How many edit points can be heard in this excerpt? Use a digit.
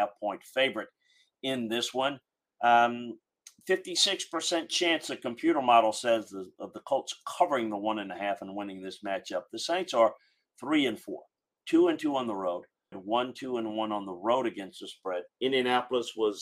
2